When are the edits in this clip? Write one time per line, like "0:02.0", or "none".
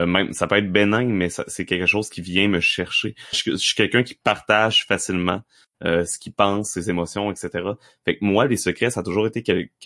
0:03.3